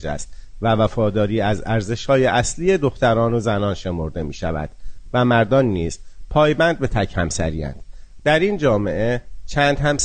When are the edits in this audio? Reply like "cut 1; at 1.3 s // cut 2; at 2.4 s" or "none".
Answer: cut 1; at 8.2 s